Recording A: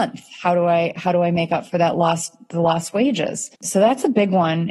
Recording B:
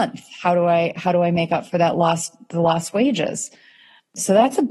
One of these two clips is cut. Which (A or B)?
A